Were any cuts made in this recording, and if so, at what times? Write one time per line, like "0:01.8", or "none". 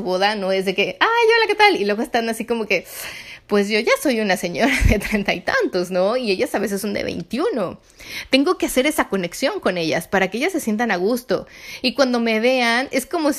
none